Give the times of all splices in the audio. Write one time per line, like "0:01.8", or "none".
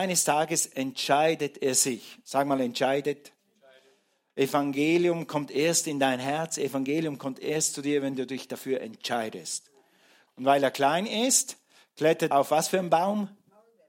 0:10.3
0:12.3